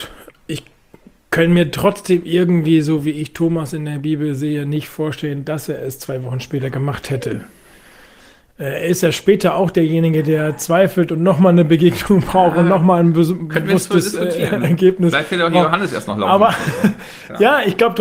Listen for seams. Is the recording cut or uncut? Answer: uncut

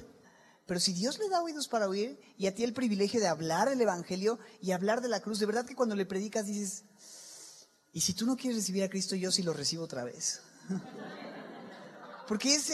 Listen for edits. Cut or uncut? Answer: uncut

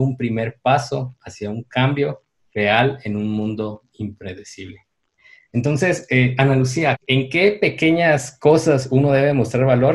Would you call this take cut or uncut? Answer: cut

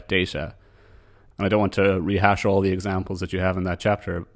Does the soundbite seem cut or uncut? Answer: cut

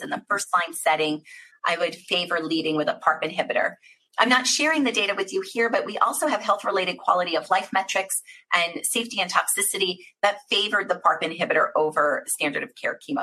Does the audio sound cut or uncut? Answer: cut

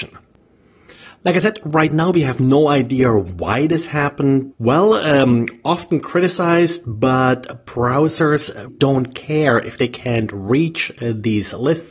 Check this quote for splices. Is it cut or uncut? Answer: cut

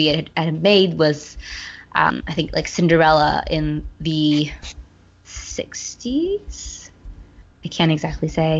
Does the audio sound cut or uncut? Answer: uncut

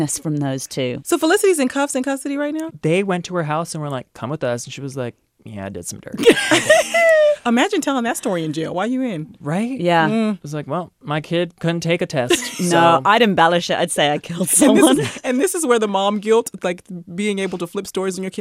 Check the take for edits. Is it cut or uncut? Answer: uncut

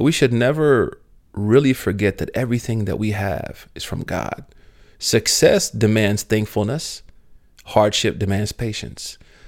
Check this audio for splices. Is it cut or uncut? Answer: uncut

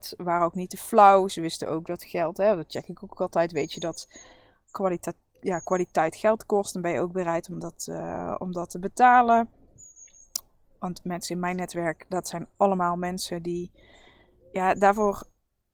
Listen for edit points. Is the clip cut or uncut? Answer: uncut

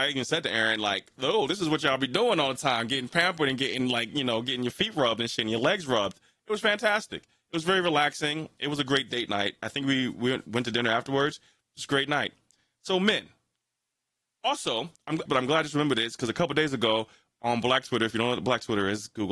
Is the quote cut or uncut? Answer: cut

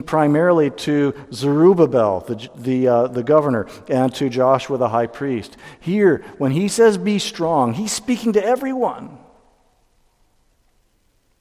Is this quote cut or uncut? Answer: uncut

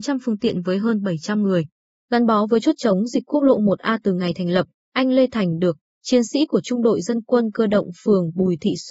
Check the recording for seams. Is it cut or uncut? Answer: uncut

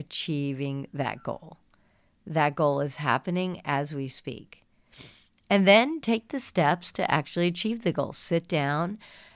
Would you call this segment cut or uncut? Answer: uncut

